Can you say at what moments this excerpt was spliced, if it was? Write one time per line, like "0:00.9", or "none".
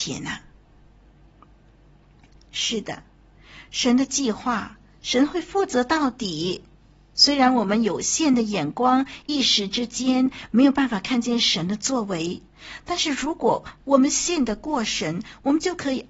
0:02.4